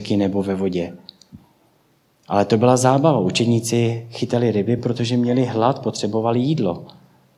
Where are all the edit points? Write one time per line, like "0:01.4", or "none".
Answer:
none